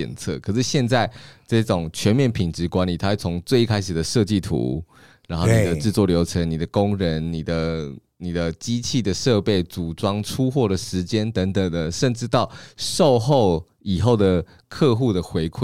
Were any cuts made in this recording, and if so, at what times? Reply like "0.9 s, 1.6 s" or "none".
none